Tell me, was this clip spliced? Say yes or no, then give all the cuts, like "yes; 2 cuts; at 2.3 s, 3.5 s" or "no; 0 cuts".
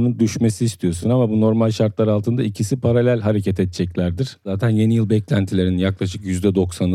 no; 0 cuts